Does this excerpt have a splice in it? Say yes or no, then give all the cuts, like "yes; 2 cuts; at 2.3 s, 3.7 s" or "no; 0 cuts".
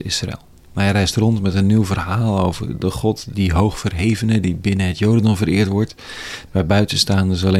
yes; 2 cuts; at 3.3 s, 6.5 s